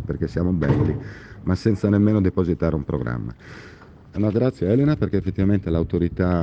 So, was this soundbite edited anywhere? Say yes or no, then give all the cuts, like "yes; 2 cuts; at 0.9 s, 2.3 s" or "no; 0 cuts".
yes; 1 cut; at 4.1 s